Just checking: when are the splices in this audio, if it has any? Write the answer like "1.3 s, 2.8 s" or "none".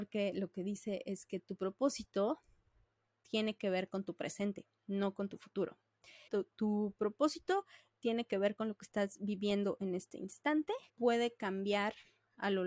6.3 s, 10.9 s

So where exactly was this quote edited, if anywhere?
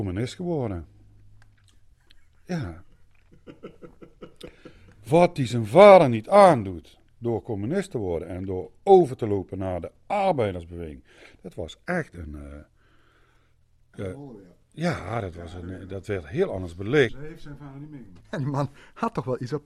17.1 s, 18.2 s

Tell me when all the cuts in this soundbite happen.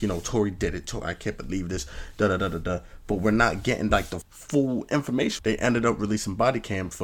4.2 s, 5.4 s

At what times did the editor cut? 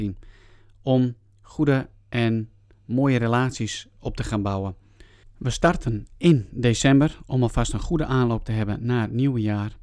5.2 s

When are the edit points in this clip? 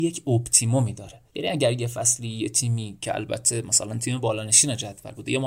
1.3 s

